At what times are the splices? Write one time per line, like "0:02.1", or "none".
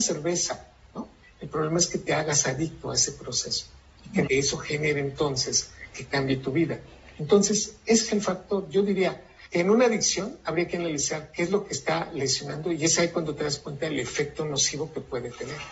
0:04.3